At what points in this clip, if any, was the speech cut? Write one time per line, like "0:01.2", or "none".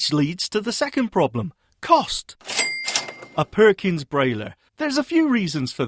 0:04.7